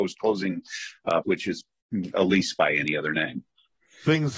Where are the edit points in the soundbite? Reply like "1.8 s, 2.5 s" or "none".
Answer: 1.2 s

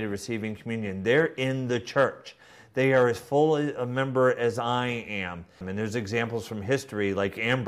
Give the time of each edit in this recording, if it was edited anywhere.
5.6 s

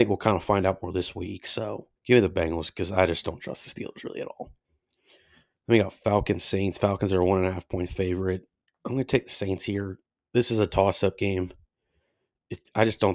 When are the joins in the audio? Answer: 2.0 s

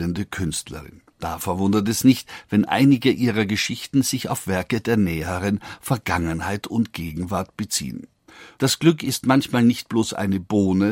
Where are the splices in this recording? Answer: 8.6 s

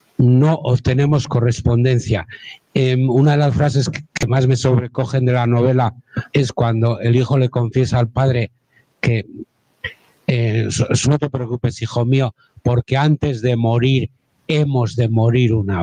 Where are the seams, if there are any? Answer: 6.3 s, 11.0 s

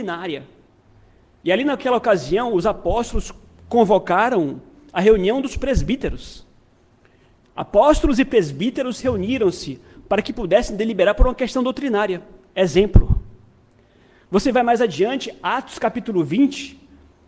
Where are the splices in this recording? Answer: none

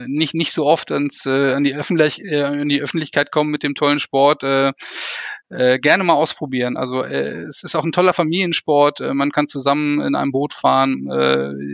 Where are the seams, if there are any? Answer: none

